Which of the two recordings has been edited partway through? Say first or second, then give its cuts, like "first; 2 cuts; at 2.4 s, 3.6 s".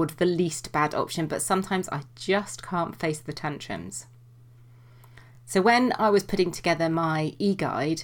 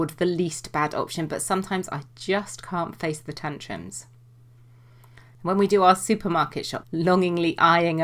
second; 2 cuts; at 5.3 s, 6.8 s